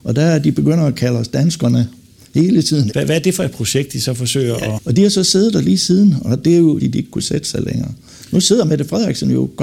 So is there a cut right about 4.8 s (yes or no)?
yes